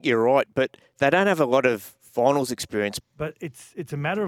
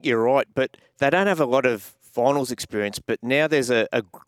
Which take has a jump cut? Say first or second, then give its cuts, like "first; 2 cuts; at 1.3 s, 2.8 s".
first; 1 cut; at 3.0 s